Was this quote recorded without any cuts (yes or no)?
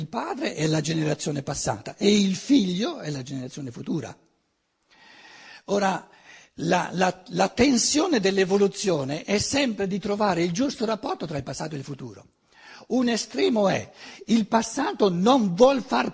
yes